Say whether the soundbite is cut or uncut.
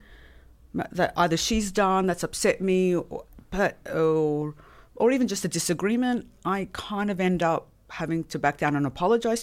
uncut